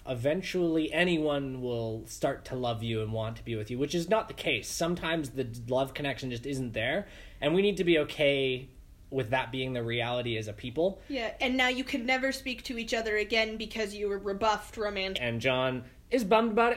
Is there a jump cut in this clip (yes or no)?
yes